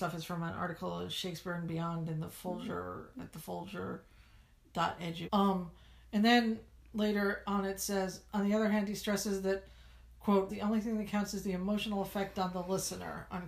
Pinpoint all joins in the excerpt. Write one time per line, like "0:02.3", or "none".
0:05.2
0:10.5